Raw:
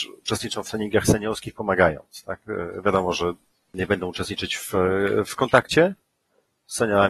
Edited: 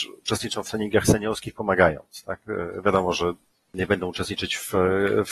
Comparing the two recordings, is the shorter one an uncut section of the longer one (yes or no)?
yes